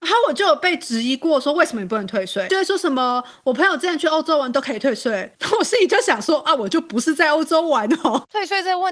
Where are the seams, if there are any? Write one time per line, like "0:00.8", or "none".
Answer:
none